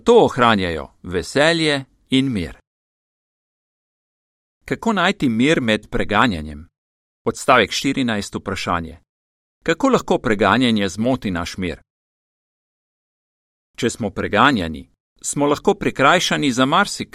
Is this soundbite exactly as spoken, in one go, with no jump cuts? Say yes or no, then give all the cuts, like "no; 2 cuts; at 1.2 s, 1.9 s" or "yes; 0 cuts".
yes; 0 cuts